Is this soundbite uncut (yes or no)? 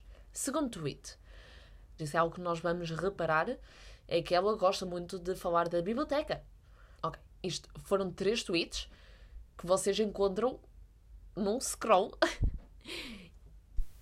no